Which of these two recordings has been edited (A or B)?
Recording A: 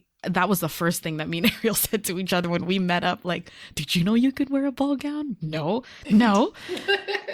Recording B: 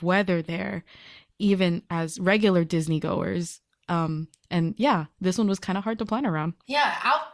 A